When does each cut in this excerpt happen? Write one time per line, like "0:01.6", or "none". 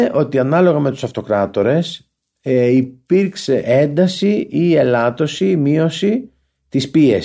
0:03.6